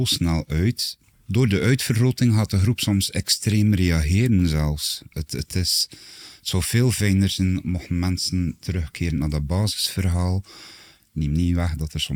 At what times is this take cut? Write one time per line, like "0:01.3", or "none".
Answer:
0:05.1
0:11.0